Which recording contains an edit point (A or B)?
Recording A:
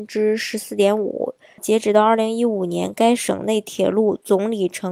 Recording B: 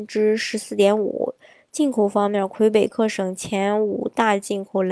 A